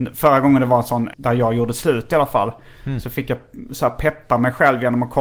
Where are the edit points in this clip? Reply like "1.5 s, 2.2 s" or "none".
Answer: 1.1 s